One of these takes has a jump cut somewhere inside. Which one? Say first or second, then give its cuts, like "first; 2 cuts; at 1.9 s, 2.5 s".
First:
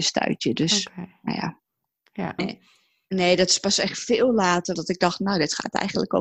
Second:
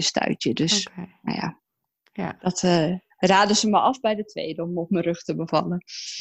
first; 2 cuts; at 2.4 s, 4.7 s